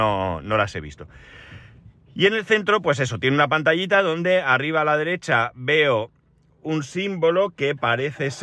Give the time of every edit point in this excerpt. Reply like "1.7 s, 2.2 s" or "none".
none